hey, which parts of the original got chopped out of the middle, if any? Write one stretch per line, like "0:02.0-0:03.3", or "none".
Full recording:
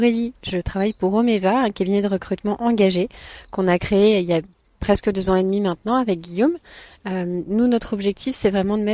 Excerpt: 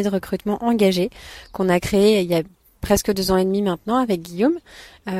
none